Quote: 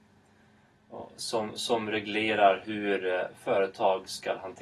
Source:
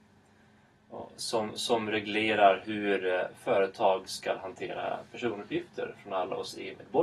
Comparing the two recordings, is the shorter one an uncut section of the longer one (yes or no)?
yes